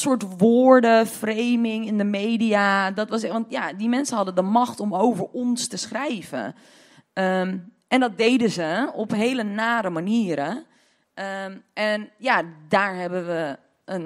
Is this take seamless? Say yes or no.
yes